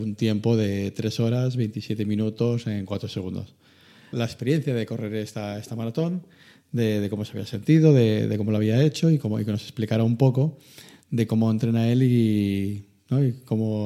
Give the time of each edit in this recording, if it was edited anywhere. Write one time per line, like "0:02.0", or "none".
0:04.1